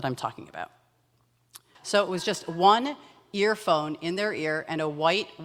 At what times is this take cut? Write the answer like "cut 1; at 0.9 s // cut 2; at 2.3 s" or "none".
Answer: cut 1; at 1.7 s